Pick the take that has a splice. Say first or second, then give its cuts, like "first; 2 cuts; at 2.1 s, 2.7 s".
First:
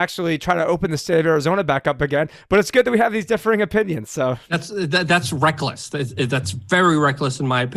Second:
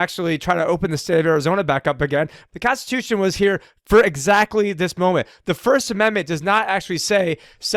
second; 1 cut; at 2.5 s